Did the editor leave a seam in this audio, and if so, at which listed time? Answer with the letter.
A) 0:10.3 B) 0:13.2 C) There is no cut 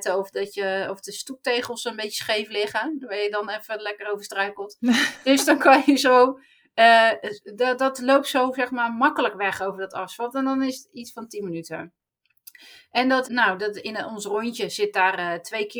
B